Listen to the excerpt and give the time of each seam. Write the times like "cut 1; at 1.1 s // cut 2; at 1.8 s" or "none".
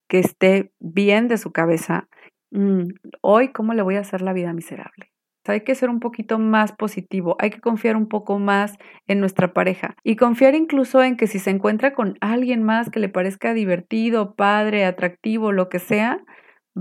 cut 1; at 2.3 s // cut 2; at 5.5 s // cut 3; at 10.0 s